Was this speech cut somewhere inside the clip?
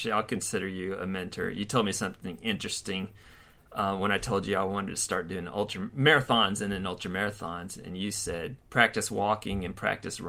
yes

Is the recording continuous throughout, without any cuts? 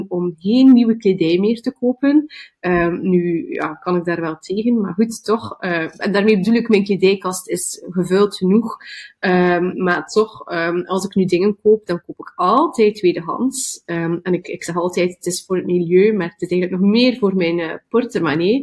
yes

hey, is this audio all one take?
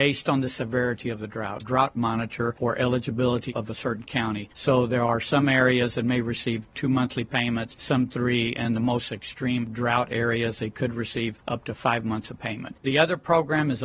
no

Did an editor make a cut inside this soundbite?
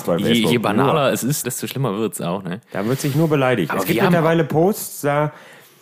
yes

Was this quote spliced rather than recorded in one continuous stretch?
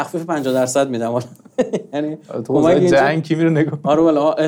no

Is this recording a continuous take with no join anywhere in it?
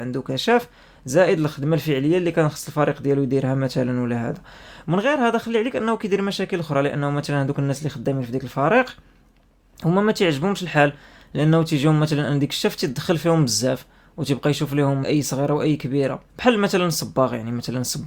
no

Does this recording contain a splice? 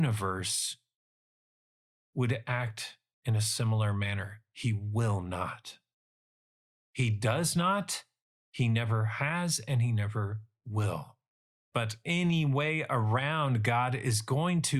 yes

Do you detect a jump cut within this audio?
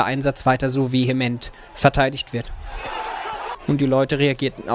yes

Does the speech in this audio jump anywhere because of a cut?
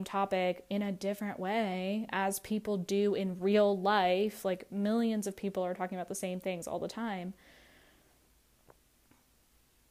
no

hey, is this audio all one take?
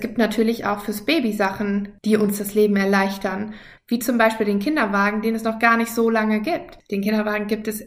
yes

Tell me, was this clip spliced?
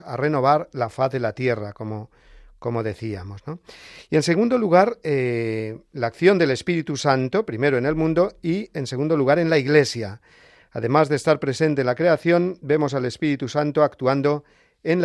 no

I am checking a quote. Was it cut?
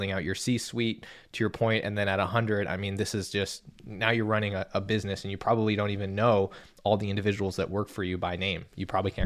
no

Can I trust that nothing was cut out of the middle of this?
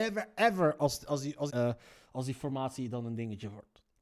no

